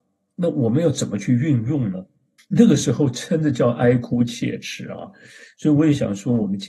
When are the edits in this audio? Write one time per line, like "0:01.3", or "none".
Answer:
0:02.4